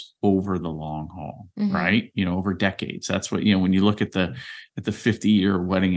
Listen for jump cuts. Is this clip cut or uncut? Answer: uncut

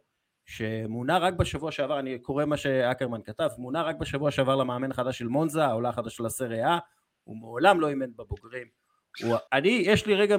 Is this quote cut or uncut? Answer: cut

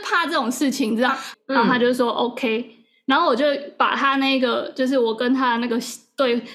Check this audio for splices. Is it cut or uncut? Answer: cut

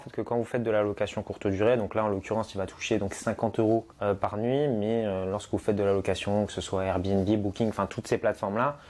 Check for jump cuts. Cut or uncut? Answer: cut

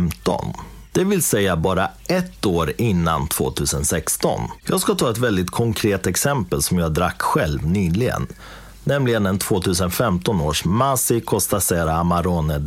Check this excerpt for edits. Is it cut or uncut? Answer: cut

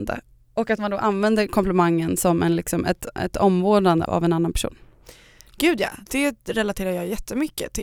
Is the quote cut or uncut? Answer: cut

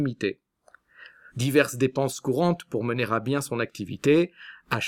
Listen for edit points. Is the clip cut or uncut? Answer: cut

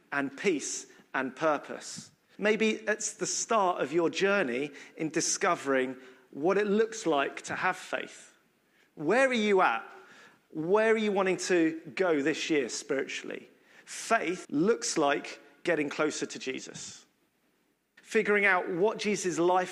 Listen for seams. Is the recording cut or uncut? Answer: cut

